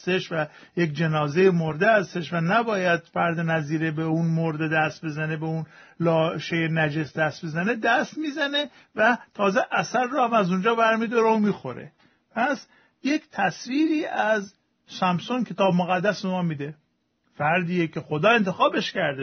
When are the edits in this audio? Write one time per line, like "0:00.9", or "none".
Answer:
none